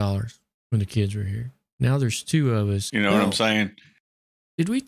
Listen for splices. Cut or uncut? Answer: cut